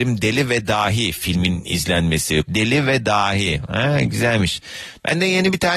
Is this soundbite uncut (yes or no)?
no